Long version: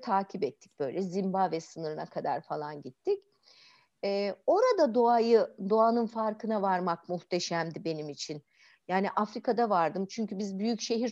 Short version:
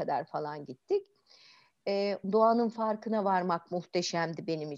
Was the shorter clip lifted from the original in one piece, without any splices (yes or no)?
no